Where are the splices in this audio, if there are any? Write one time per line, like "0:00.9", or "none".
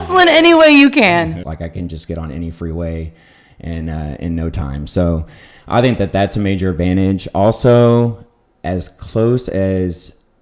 0:01.4